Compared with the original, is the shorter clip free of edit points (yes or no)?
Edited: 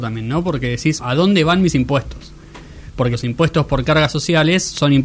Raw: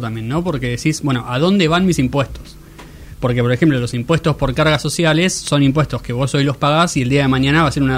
no